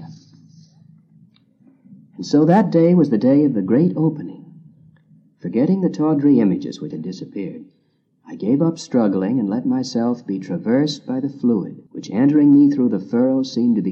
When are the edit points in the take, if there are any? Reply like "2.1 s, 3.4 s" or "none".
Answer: 6.9 s, 11.9 s